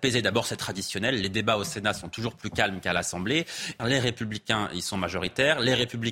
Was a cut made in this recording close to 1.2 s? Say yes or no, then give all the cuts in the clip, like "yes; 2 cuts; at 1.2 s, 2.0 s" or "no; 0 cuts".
no; 1 cut; at 3.8 s